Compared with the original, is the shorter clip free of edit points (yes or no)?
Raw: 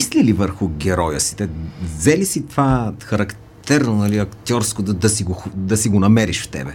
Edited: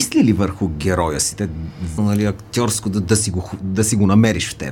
no